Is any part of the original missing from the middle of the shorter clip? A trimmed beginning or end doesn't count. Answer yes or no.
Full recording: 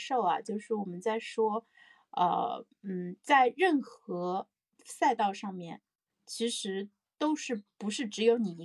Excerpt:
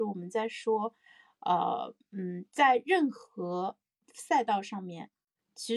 no